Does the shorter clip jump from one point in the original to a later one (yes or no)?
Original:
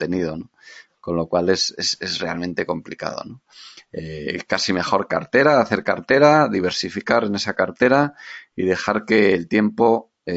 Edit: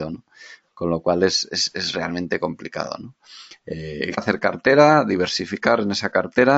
yes